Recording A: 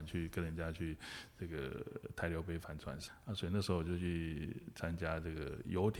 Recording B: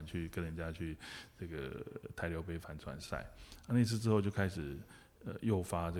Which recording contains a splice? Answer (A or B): A